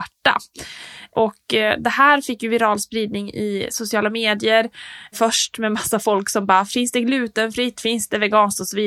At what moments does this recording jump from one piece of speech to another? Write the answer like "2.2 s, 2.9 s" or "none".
7.7 s